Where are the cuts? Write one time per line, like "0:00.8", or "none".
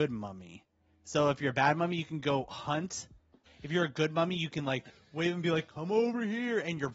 0:03.5